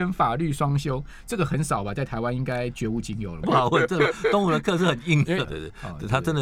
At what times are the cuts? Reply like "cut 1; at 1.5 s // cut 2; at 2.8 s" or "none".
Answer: cut 1; at 3.4 s // cut 2; at 5.4 s